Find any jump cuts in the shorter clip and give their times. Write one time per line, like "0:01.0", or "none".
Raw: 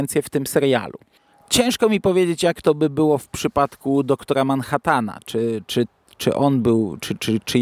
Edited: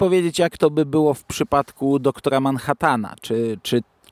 none